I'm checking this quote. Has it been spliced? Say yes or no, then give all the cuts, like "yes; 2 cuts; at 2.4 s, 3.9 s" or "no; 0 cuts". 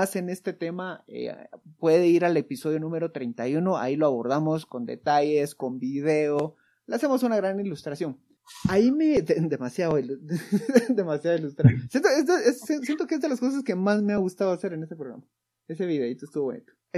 no; 0 cuts